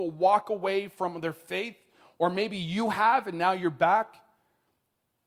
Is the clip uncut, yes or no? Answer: yes